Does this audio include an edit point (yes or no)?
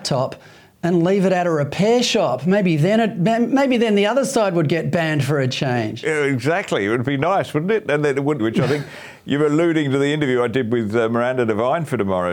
yes